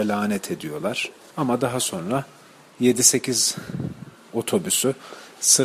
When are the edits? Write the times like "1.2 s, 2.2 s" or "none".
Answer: 1.3 s